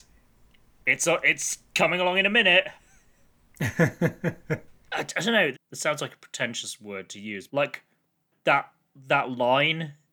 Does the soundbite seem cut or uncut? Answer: cut